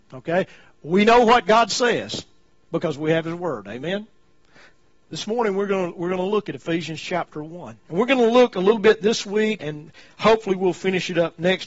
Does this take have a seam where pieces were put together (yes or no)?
yes